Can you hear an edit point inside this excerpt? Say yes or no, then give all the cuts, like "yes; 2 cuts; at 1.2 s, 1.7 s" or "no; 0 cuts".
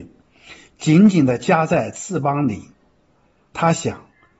no; 0 cuts